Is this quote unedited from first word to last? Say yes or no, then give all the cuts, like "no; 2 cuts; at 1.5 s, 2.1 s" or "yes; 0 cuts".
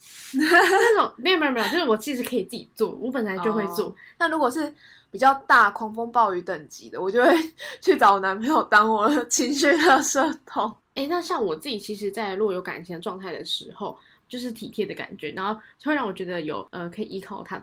no; 2 cuts; at 4.2 s, 14.2 s